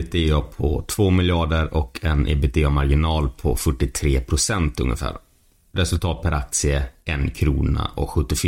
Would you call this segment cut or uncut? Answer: uncut